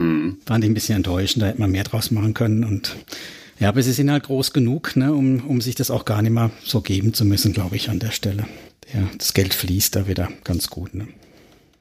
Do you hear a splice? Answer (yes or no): no